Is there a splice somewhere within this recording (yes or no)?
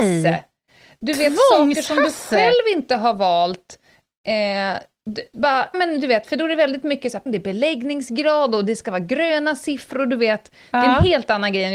yes